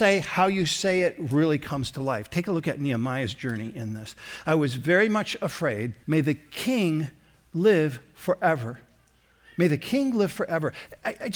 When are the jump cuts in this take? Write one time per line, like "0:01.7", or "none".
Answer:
0:06.0